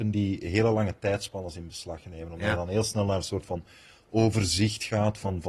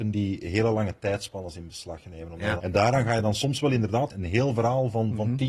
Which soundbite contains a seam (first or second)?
second